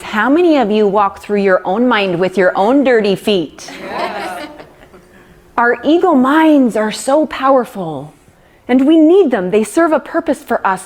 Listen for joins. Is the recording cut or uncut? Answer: uncut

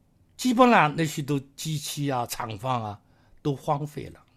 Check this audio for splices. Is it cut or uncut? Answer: uncut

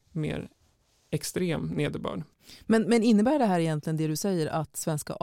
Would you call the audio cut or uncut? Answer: uncut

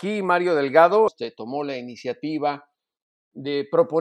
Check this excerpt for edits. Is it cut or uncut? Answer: cut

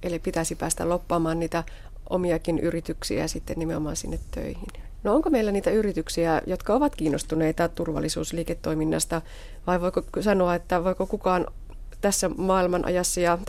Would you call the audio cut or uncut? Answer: cut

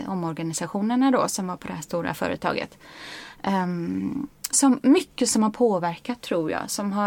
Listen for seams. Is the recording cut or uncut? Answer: cut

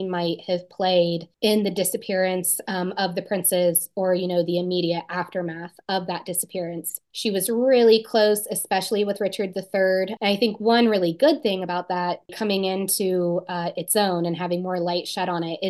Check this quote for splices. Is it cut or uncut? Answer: cut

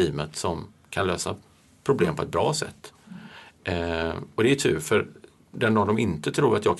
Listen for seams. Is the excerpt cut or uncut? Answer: uncut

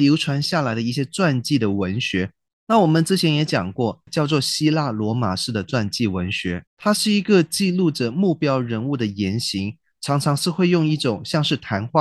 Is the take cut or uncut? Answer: cut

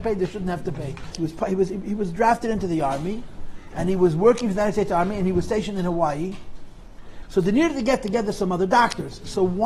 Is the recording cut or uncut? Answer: cut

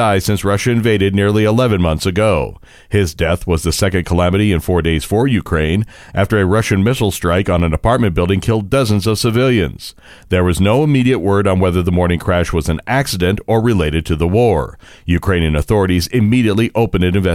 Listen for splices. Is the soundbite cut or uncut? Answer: uncut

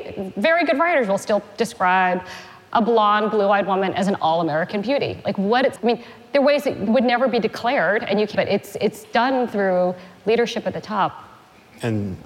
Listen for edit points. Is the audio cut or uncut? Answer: cut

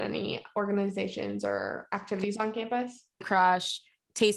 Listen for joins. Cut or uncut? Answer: cut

